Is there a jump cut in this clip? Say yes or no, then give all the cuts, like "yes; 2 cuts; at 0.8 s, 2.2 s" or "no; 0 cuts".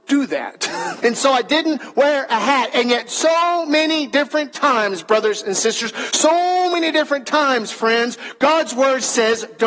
yes; 1 cut; at 1.0 s